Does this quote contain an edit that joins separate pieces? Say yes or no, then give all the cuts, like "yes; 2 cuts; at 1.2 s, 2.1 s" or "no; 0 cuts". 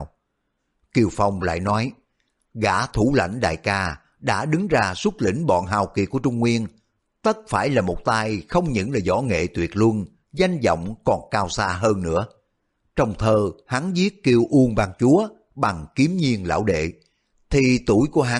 no; 0 cuts